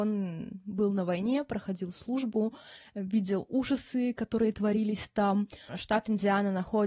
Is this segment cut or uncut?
cut